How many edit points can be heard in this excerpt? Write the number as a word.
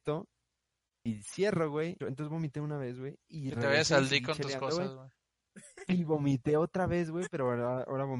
two